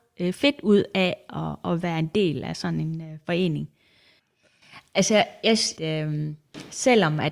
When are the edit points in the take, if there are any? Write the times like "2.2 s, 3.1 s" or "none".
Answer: 4.2 s, 5.8 s